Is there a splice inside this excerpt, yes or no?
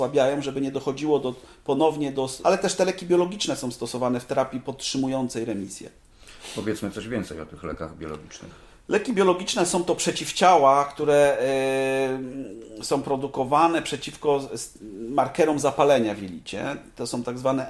yes